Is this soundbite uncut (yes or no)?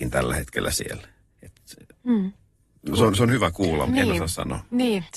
no